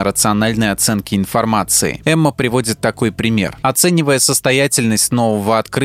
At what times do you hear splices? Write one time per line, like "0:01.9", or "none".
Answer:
0:02.0
0:03.6